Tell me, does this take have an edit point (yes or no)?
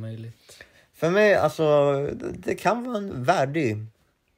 no